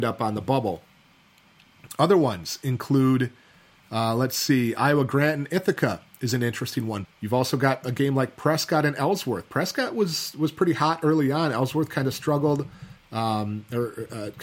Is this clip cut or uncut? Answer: cut